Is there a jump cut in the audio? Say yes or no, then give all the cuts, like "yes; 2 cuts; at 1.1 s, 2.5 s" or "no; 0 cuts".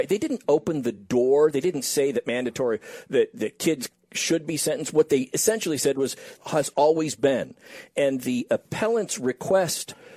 yes; 1 cut; at 6.4 s